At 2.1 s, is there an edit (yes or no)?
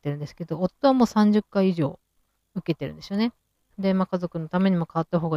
no